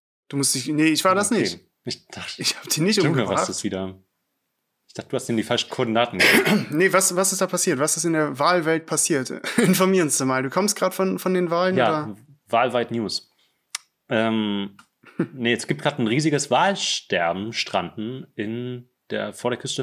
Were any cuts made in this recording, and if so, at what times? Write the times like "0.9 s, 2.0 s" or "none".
none